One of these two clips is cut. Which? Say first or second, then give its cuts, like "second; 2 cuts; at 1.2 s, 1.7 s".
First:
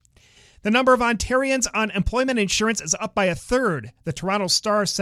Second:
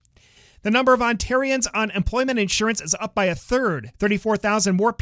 second; 1 cut; at 3.9 s